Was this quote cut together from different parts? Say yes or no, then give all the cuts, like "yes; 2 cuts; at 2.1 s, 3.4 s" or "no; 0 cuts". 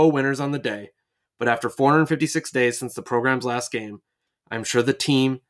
no; 0 cuts